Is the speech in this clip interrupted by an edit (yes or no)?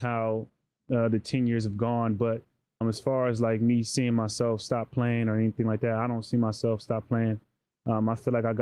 yes